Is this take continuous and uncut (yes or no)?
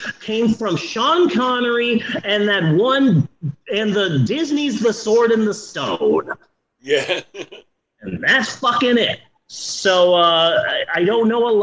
yes